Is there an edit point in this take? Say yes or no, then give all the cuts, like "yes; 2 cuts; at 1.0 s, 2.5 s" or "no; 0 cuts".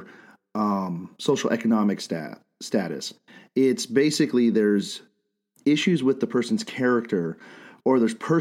no; 0 cuts